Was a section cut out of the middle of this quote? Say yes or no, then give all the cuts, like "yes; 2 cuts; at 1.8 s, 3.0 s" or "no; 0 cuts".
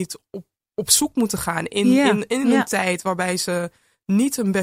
no; 0 cuts